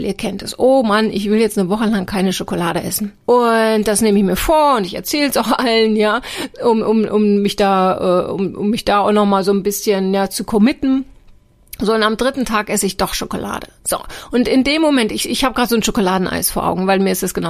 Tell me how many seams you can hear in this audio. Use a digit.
1